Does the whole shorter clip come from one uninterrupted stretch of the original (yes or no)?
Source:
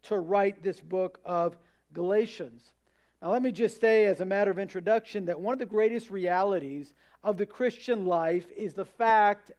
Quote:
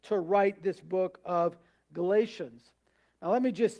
yes